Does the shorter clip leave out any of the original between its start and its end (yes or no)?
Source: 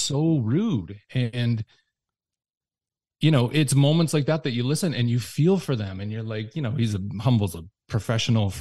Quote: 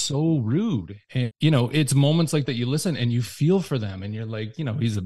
yes